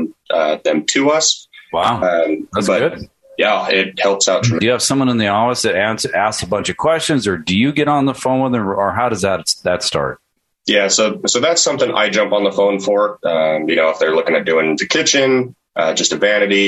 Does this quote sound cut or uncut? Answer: cut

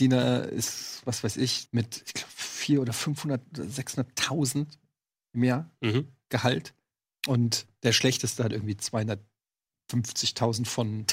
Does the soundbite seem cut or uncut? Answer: cut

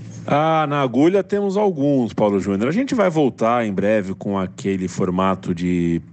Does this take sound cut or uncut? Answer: uncut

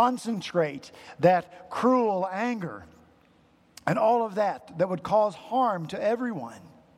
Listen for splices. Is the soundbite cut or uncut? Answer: uncut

